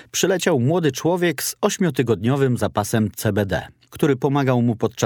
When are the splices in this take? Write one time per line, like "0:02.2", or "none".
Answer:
0:03.9